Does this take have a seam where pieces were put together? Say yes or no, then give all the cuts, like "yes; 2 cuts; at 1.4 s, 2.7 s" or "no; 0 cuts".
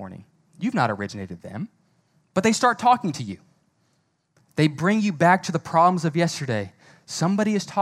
no; 0 cuts